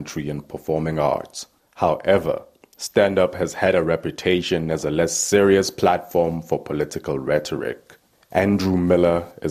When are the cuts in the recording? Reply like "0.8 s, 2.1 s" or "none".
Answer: none